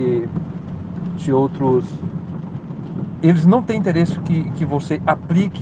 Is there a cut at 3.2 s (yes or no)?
yes